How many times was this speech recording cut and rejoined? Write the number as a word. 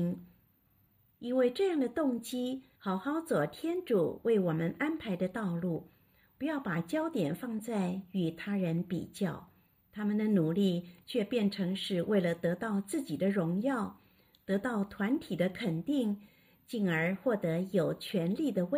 two